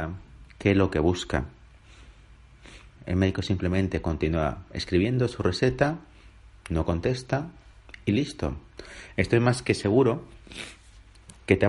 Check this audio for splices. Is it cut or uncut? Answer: cut